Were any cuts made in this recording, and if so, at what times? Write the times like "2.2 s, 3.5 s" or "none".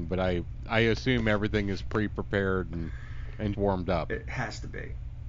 3.5 s